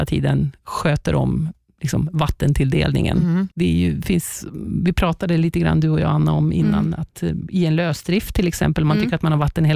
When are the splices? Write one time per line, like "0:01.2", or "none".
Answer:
0:03.5